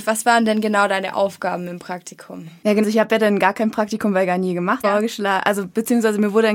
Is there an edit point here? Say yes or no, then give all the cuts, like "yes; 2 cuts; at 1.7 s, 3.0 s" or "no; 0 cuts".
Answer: yes; 2 cuts; at 2.8 s, 4.8 s